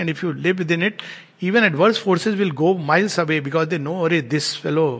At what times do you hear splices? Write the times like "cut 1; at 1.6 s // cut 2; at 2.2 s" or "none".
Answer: none